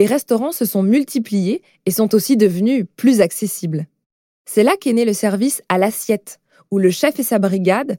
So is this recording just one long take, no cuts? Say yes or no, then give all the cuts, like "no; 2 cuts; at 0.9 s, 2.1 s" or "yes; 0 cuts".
yes; 0 cuts